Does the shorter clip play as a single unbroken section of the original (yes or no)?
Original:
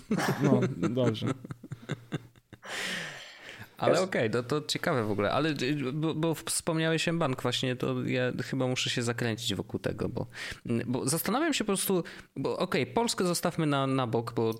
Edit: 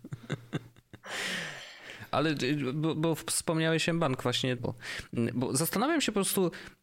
no